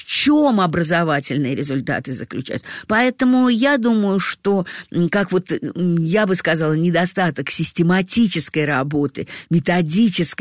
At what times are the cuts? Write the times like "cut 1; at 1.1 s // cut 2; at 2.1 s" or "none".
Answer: cut 1; at 2.9 s